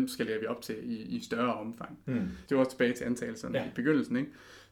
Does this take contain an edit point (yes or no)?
yes